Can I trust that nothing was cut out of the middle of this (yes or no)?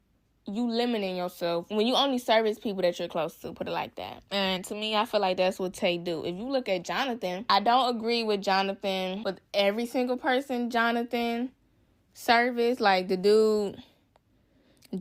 yes